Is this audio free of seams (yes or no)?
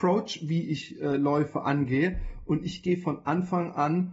yes